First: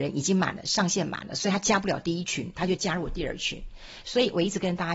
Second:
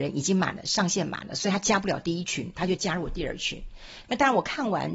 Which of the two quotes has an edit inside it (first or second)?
second